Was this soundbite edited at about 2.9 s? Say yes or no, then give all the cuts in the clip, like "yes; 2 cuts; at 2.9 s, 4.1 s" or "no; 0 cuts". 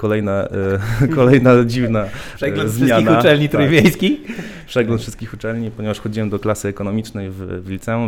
no; 0 cuts